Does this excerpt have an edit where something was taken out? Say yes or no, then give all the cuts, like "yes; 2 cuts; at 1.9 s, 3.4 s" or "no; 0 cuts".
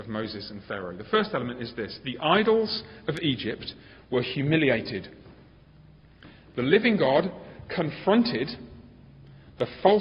no; 0 cuts